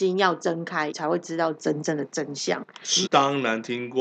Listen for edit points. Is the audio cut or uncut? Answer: cut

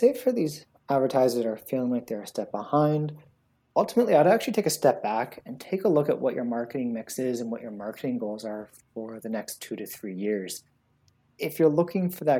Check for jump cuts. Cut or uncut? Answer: uncut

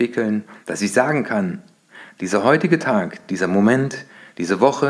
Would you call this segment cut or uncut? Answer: uncut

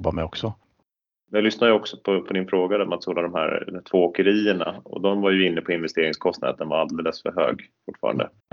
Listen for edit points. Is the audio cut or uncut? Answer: uncut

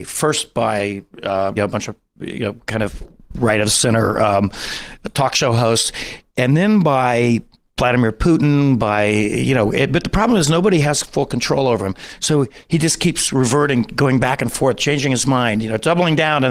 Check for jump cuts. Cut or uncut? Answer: cut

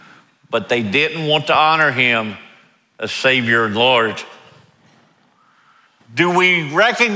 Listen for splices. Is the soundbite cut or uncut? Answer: cut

